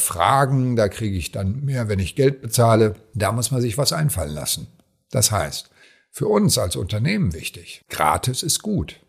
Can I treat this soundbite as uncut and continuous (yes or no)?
yes